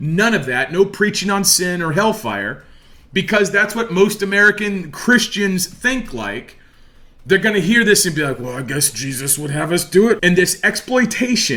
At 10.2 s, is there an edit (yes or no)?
yes